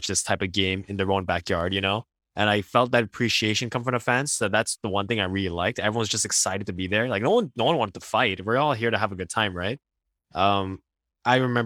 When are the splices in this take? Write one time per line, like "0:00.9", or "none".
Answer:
none